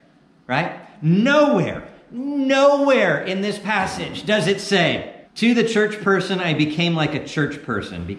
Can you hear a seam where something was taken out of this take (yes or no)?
yes